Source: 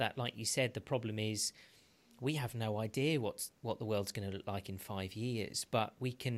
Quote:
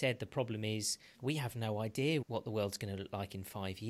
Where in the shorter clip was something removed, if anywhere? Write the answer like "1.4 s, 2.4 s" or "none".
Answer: 1.1 s, 2.2 s

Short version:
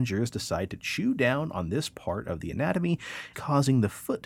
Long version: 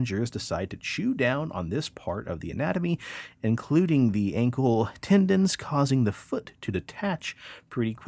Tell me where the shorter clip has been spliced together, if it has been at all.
3.3 s

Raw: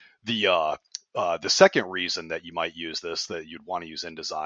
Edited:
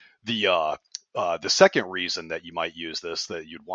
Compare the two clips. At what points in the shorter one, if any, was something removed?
none

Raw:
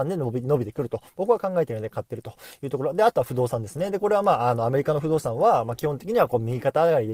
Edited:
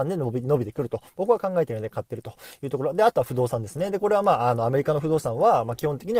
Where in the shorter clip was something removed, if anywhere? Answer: none

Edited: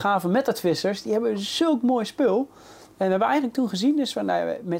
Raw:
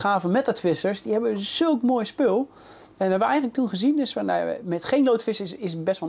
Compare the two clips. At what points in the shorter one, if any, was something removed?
none

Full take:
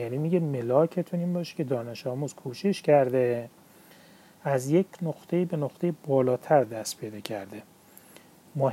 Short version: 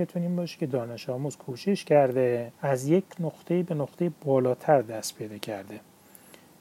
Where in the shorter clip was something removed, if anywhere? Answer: 2.5 s

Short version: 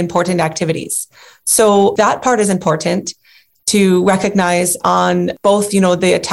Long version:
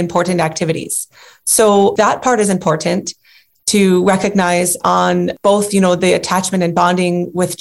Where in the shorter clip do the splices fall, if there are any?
none

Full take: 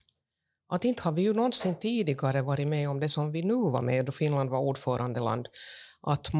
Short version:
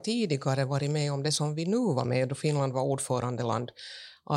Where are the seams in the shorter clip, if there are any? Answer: none

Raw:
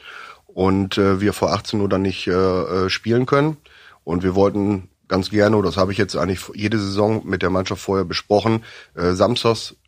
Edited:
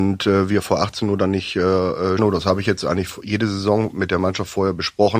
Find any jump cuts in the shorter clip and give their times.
2.2 s

